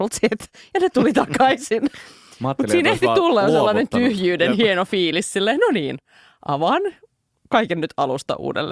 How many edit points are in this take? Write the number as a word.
zero